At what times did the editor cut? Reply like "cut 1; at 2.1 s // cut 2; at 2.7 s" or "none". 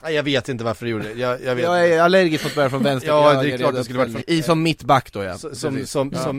cut 1; at 4.2 s